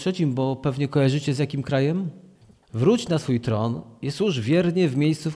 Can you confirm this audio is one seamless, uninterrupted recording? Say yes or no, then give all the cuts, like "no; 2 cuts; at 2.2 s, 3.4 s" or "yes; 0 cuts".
no; 1 cut; at 2.6 s